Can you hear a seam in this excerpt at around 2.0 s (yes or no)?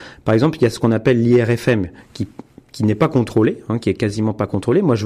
no